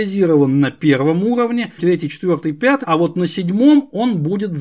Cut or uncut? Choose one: cut